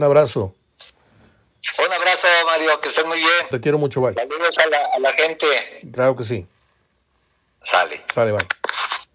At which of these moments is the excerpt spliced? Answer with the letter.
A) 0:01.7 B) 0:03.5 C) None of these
B